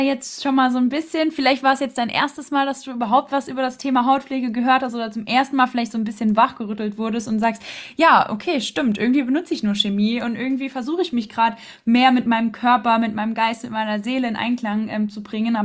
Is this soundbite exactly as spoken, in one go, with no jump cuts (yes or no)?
yes